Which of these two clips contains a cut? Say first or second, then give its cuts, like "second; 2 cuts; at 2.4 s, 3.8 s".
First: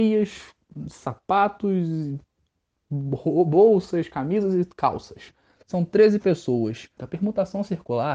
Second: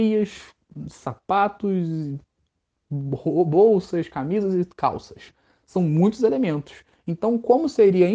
first; 2 cuts; at 5.6 s, 7.0 s